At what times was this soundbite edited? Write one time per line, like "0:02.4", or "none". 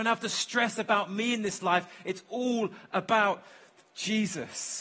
none